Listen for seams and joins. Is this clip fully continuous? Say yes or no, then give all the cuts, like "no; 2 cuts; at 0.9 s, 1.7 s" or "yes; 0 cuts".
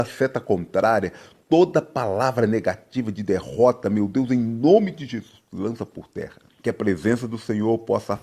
no; 1 cut; at 6.5 s